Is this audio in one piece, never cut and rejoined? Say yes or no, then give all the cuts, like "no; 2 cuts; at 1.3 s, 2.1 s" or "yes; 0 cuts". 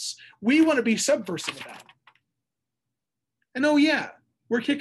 yes; 0 cuts